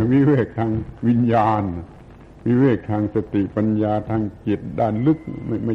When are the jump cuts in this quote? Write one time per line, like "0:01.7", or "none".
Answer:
none